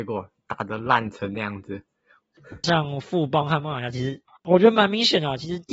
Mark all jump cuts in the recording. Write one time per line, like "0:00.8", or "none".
0:04.4